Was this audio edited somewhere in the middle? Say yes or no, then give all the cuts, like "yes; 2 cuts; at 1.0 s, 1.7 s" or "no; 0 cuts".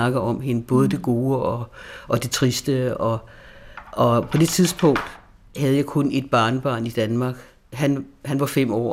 no; 0 cuts